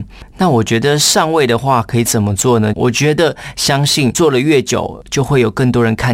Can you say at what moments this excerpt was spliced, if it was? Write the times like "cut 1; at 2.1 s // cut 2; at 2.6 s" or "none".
cut 1; at 2.7 s